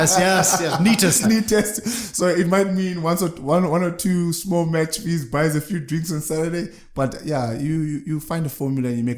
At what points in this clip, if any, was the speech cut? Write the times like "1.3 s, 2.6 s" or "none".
1.2 s